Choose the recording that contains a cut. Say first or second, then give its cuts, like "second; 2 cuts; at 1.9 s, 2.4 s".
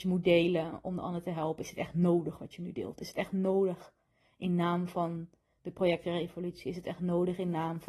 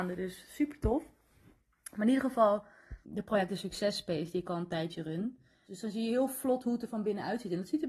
second; 2 cuts; at 3.0 s, 5.7 s